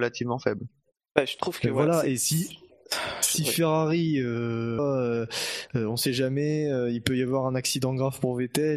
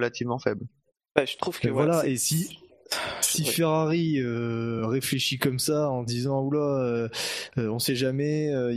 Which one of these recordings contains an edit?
first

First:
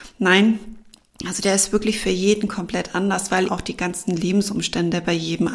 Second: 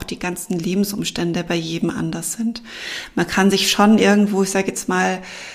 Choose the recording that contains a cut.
first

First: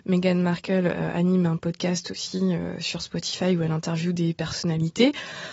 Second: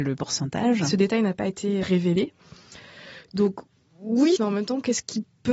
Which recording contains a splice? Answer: second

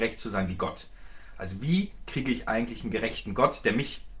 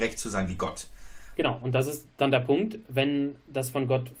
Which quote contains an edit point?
second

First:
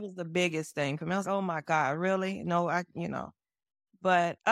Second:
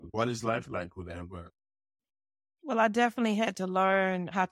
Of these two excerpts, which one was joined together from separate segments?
first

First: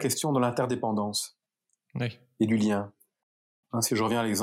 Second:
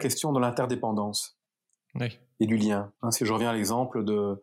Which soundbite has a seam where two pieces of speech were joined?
second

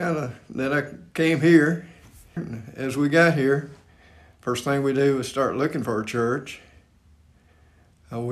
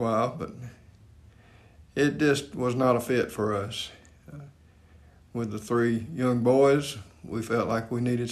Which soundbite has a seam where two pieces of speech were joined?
first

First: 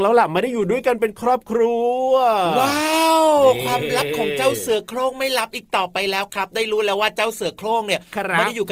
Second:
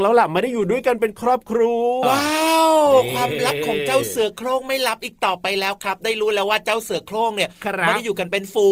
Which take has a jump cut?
second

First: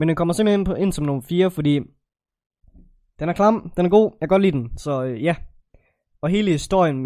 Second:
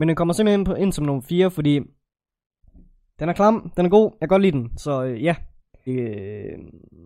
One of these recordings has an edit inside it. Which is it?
second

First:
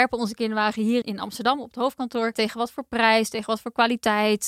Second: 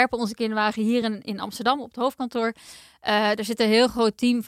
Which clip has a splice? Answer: first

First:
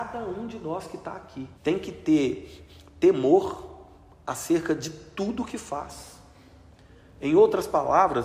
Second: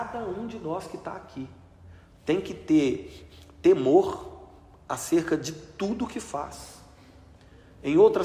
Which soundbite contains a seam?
first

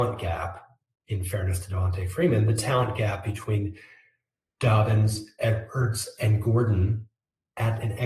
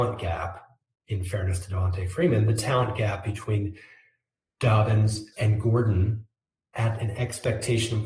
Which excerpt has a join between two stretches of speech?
second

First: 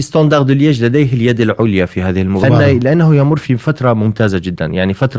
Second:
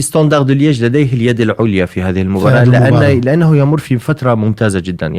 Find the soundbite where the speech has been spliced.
first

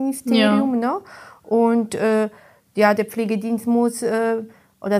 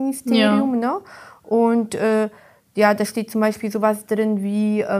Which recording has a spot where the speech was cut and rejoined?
first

